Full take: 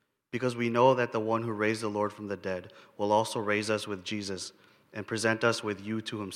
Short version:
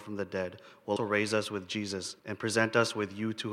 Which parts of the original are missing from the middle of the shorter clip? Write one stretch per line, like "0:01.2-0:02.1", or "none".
0:03.1-0:03.3
0:04.6-0:04.9